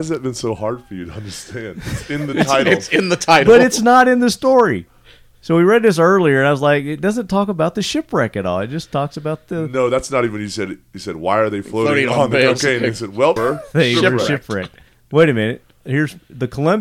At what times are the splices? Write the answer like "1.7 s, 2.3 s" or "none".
13.4 s